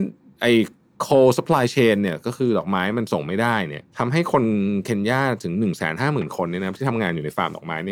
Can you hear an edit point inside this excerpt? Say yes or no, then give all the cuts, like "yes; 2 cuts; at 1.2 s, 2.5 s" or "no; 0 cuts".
yes; 1 cut; at 3.9 s